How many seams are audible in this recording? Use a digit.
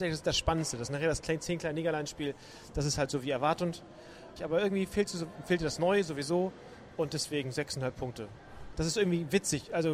2